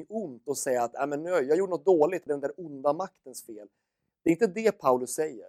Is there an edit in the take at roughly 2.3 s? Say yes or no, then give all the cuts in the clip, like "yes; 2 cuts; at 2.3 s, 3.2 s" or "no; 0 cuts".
yes; 1 cut; at 2.3 s